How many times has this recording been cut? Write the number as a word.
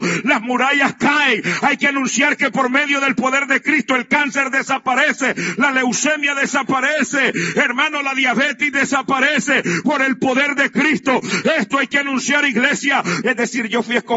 one